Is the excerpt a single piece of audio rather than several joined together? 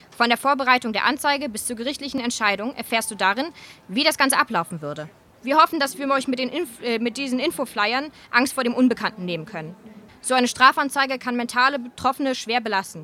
no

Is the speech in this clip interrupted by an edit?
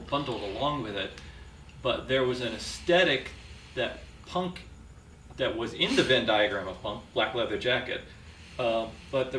no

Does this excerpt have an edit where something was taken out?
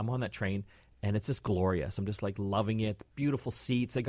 no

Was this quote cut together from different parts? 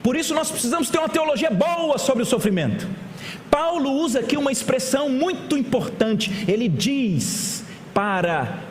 no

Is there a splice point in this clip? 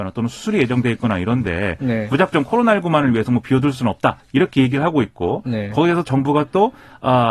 no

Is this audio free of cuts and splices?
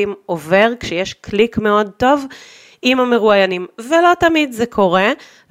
yes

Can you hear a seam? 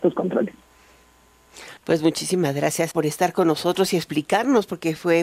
yes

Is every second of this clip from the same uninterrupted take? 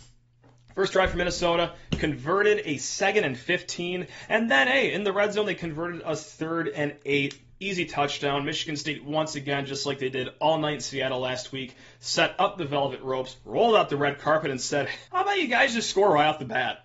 no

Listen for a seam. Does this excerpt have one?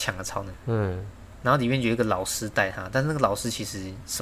no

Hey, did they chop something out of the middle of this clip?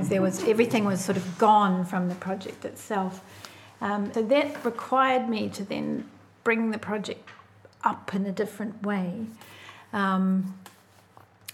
yes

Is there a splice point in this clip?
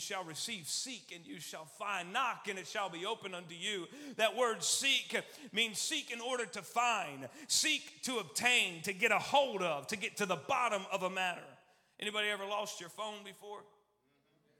no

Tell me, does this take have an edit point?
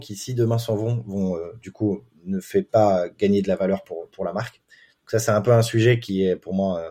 no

